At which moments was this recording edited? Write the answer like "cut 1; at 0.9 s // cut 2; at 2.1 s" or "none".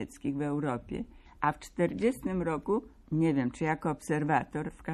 none